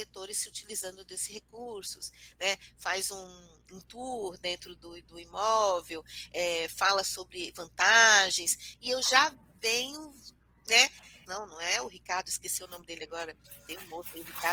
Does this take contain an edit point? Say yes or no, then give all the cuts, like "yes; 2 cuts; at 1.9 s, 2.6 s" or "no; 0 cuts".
yes; 2 cuts; at 4.8 s, 11.3 s